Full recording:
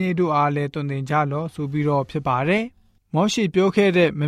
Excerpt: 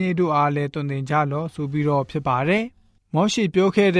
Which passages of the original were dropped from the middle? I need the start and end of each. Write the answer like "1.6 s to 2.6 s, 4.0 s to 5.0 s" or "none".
none

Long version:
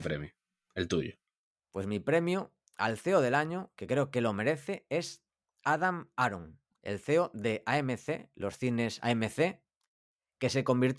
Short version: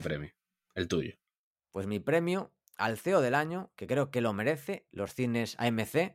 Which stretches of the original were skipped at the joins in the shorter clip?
4.9 s to 8.3 s

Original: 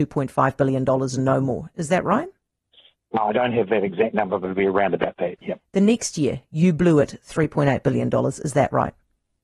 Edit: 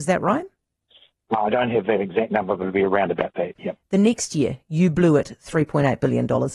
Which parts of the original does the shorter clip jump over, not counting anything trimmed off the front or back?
none

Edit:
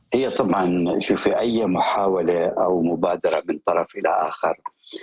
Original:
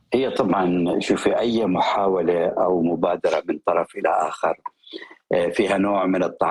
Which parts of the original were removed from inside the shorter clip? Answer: none

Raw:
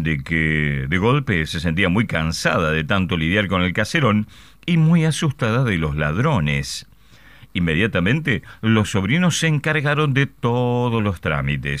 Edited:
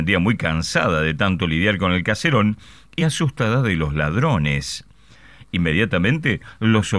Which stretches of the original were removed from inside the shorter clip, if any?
4.7 s to 5.0 s

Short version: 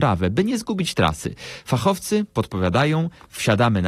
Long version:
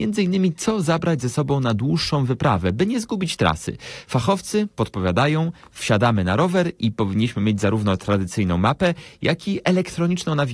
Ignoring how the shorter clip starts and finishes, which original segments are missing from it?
none

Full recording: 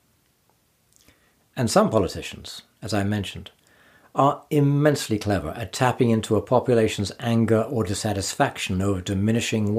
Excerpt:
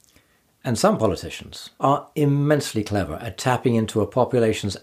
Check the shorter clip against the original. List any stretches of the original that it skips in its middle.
2.7 s to 4.1 s

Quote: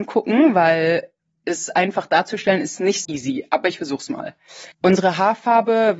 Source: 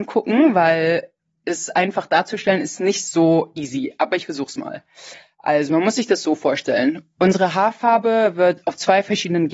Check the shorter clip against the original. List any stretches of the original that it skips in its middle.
3.0 s to 3.5 s, 5.2 s to 7.1 s

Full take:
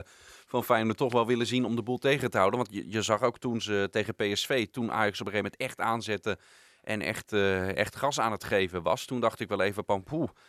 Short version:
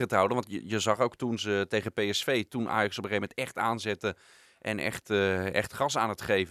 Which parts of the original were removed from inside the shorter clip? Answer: none

